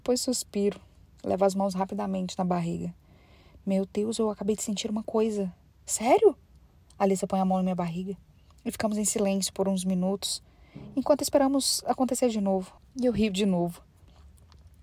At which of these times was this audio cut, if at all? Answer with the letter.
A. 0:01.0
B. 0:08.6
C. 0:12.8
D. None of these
C